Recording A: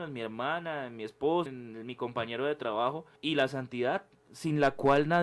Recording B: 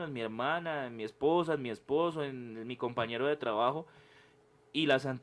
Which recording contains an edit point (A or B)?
A